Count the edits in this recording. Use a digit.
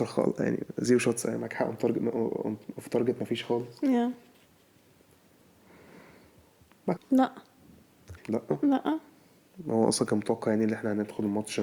2